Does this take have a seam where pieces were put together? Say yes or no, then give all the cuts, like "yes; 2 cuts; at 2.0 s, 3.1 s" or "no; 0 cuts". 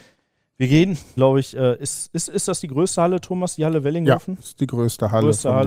yes; 1 cut; at 1.2 s